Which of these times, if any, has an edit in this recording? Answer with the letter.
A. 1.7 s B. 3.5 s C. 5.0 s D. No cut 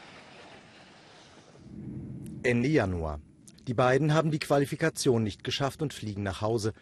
B